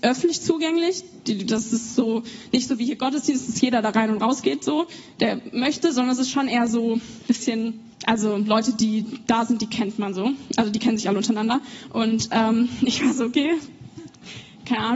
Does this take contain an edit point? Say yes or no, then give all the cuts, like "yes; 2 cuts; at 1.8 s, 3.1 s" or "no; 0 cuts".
yes; 2 cuts; at 7.9 s, 11.9 s